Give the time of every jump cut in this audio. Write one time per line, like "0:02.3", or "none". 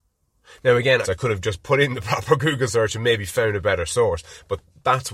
0:01.0